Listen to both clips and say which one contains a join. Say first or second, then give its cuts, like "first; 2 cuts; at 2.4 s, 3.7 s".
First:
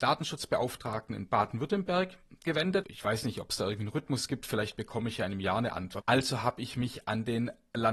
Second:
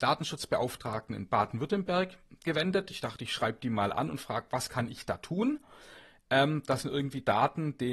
first; 2 cuts; at 2.8 s, 6.0 s